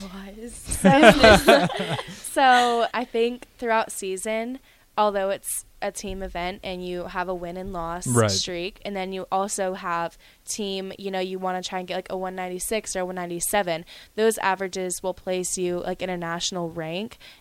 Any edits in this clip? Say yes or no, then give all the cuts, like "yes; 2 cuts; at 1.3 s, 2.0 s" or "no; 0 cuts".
yes; 1 cut; at 2.9 s